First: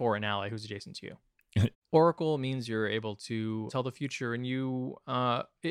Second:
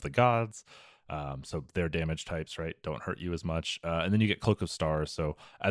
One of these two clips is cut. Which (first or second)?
first